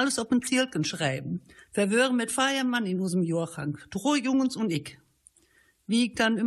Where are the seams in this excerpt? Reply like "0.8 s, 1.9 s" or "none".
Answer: 1.6 s

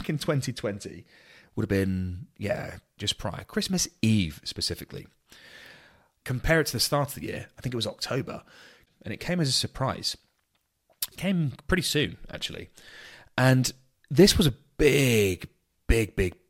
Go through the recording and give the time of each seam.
3.0 s, 6.2 s, 8.9 s

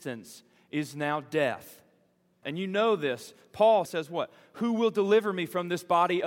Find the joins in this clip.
2.4 s, 3.9 s

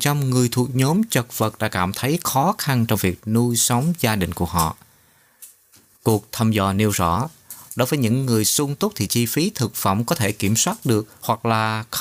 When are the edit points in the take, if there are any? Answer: none

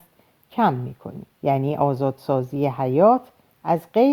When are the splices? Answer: 1.3 s

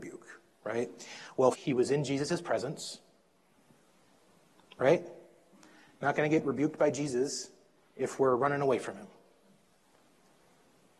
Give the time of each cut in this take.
1.5 s

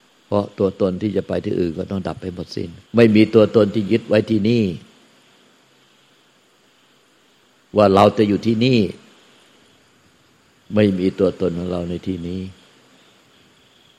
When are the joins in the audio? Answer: 2.9 s

